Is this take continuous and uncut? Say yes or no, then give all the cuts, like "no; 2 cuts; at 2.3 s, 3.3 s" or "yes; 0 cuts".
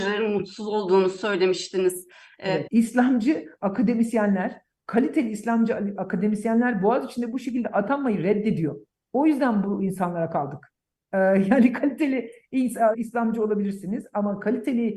no; 2 cuts; at 2.7 s, 12.9 s